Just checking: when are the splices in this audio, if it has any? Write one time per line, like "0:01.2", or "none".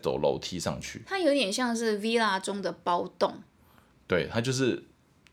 none